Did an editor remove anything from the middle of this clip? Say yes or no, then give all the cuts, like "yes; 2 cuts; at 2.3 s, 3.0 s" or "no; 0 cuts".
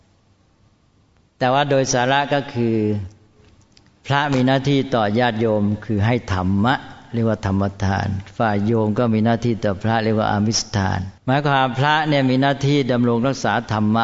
yes; 1 cut; at 11.2 s